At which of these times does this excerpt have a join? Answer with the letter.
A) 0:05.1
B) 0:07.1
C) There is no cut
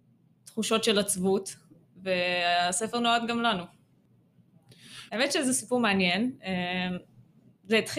A